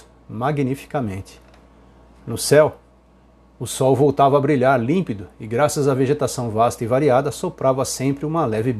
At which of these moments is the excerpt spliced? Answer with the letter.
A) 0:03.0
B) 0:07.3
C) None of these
C